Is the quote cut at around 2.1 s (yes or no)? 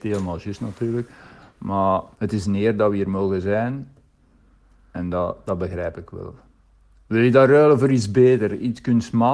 yes